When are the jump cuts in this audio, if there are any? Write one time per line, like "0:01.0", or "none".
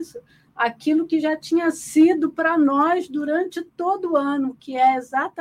none